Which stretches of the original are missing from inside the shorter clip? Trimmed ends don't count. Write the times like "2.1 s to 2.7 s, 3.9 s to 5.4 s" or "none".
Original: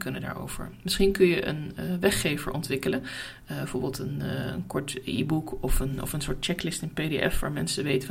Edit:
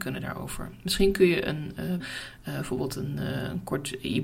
2.0 s to 3.0 s